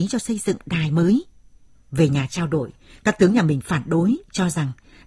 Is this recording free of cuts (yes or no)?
no